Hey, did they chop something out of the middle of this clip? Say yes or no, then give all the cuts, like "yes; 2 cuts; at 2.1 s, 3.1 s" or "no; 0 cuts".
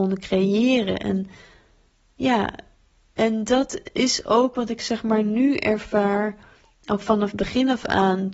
no; 0 cuts